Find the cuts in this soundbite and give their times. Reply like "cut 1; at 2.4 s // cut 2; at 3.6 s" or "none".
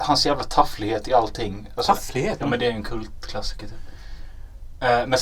cut 1; at 2.4 s